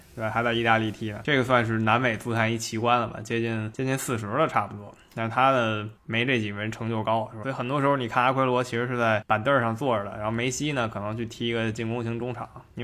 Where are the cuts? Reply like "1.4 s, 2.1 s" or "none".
7.4 s